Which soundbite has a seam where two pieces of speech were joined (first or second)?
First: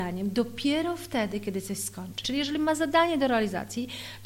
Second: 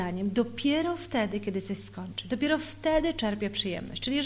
first